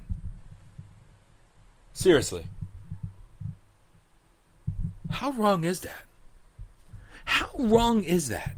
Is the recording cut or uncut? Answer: uncut